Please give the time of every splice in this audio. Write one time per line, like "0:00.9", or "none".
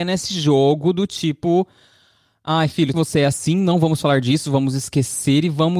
0:02.9